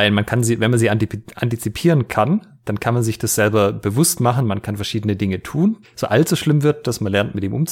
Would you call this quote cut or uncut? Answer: cut